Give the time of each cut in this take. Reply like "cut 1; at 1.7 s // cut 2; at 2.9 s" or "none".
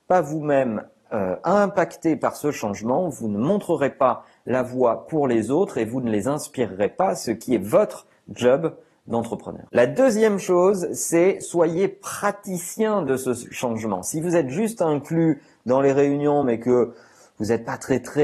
none